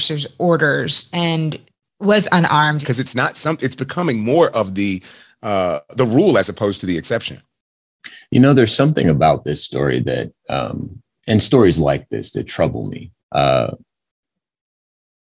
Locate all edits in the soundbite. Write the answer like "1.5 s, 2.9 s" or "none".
2.8 s, 13.2 s